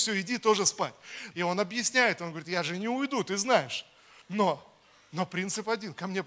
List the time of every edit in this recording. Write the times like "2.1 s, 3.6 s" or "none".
1.3 s, 4.2 s